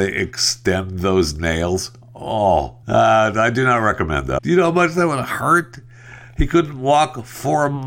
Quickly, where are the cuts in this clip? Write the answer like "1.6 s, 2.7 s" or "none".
2.8 s, 4.4 s